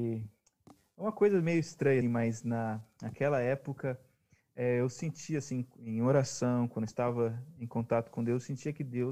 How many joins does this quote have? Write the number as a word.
one